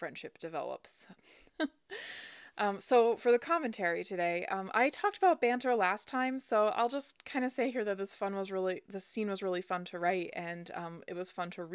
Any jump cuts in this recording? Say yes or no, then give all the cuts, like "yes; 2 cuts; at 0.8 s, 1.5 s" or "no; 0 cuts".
yes; 1 cut; at 1.1 s